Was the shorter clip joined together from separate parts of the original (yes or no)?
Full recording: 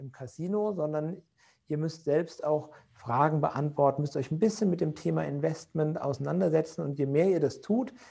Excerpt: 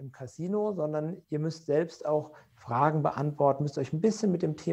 yes